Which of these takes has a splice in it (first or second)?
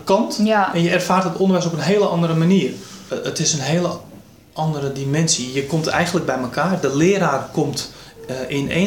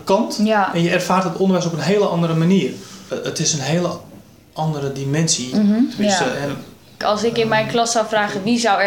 second